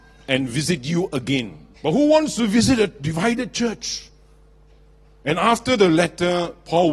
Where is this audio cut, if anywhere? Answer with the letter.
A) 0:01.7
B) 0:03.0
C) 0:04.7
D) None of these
A